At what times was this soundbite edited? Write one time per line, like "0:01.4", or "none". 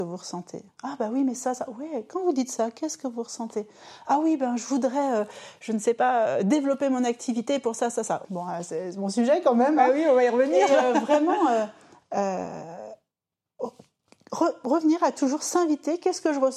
0:08.2